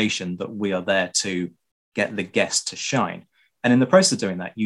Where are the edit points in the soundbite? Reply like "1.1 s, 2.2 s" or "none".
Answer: none